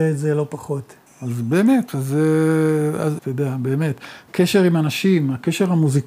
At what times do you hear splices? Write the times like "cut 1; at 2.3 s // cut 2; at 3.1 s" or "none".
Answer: cut 1; at 1.1 s // cut 2; at 3.2 s